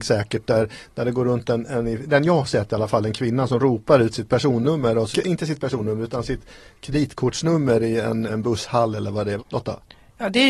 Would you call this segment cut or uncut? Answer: cut